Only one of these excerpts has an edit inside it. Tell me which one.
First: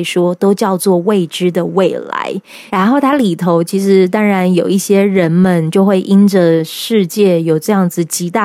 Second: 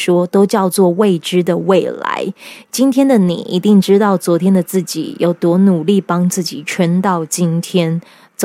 first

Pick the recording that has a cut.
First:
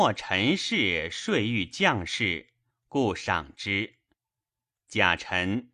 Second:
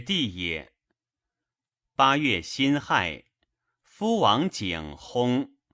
first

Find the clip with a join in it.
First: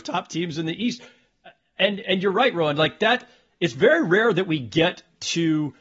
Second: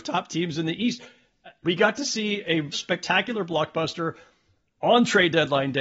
second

